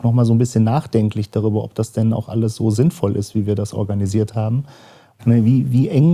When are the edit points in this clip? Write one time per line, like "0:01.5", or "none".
0:05.2